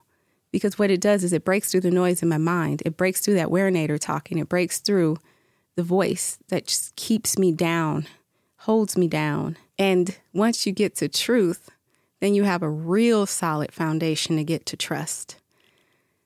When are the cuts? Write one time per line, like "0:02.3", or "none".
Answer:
0:09.7